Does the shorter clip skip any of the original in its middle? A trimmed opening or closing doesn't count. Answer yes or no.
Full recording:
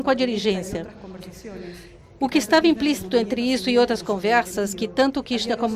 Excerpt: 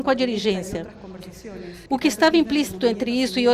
yes